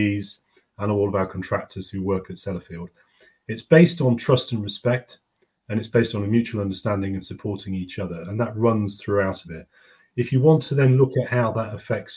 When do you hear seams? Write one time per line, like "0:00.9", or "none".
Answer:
none